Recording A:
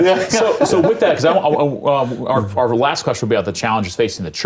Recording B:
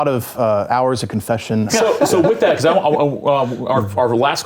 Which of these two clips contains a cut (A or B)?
B